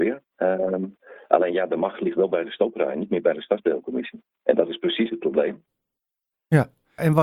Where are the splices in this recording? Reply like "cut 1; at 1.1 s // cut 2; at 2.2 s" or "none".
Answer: none